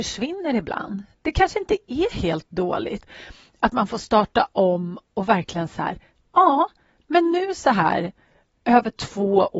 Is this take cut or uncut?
uncut